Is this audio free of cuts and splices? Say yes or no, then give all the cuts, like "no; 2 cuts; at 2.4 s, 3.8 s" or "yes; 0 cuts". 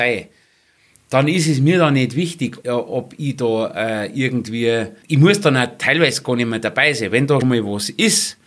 no; 3 cuts; at 2.6 s, 5.0 s, 7.4 s